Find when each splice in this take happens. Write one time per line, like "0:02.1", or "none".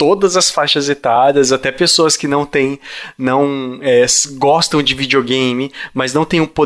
none